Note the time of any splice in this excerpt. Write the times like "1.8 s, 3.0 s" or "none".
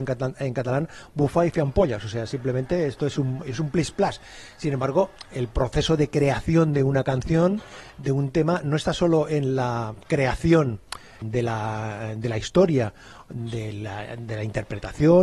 11.2 s